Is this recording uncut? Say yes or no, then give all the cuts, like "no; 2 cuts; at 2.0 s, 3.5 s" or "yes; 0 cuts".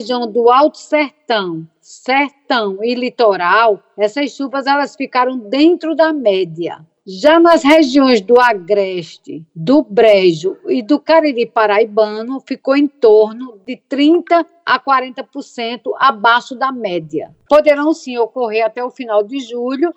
no; 1 cut; at 17.5 s